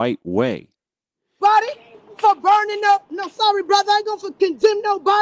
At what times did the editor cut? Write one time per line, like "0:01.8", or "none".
0:01.4